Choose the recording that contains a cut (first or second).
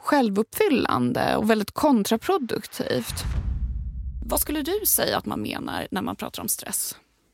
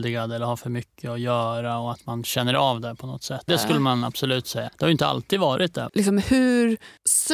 second